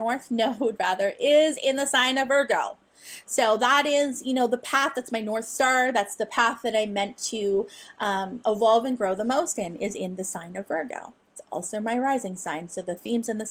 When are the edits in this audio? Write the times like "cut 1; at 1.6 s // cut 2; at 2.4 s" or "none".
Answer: none